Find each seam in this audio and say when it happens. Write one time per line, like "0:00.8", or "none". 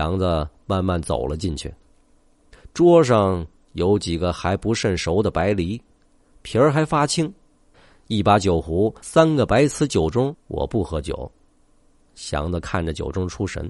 0:10.3